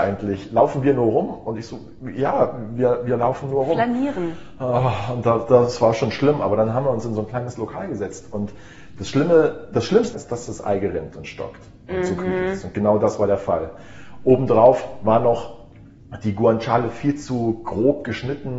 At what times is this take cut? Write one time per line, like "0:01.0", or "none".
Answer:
0:10.1